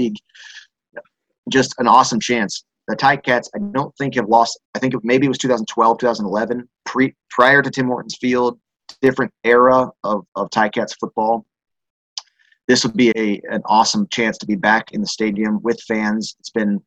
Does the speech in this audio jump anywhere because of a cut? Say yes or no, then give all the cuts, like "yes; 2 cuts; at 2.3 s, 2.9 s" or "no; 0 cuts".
yes; 3 cuts; at 4.6 s, 6.8 s, 13.1 s